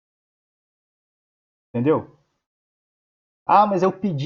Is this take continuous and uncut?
yes; 0 cuts

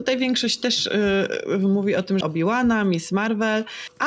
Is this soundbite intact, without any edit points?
no; 1 cut; at 2.2 s

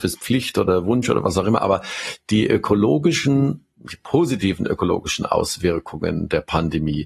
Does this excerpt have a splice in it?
no; 0 cuts

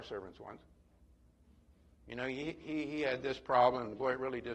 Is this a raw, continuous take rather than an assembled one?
yes; 0 cuts

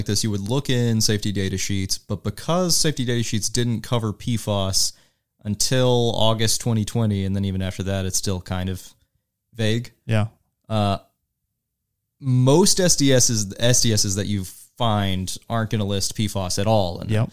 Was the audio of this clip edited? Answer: no; 0 cuts

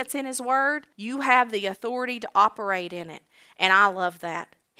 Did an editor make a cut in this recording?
yes; 1 cut; at 0.9 s

